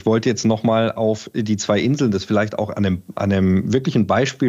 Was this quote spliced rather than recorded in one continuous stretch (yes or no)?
no